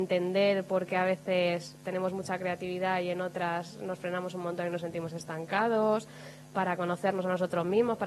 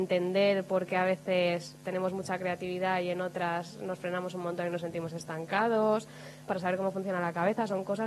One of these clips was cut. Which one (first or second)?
second